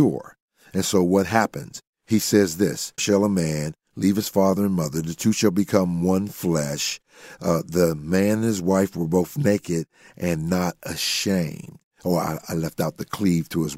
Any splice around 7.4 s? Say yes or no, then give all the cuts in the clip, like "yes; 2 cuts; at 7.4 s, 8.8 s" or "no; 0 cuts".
no; 1 cut; at 3.0 s